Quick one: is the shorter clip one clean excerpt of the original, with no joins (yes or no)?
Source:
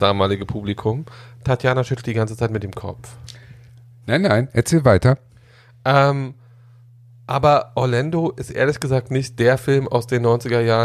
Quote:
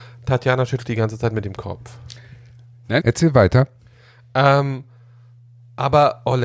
no